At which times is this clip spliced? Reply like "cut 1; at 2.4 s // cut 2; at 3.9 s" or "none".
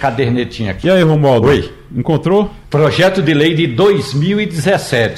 none